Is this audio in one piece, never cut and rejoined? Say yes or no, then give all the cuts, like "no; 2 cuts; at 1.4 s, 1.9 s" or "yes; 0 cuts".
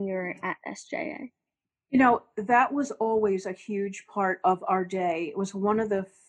yes; 0 cuts